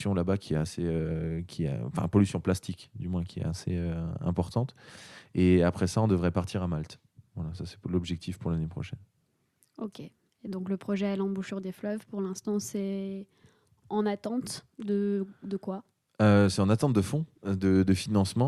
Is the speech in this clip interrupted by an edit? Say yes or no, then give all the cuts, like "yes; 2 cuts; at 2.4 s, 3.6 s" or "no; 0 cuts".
no; 0 cuts